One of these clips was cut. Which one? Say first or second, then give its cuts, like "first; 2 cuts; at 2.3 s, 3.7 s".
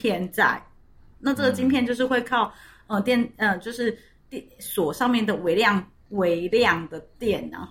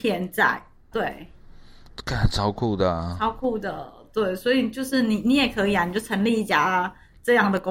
second; 1 cut; at 0.9 s